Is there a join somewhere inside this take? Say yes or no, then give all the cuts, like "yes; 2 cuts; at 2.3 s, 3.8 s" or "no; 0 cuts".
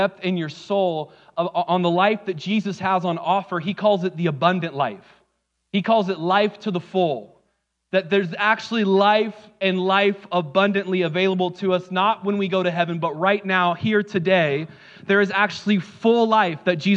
no; 0 cuts